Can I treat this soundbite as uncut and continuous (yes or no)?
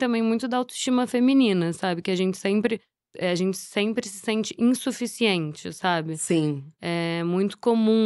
yes